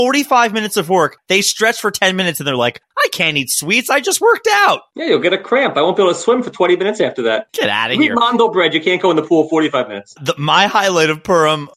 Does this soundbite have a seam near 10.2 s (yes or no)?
yes